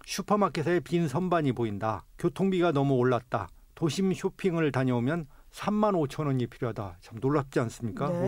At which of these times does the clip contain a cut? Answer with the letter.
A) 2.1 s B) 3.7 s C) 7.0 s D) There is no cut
A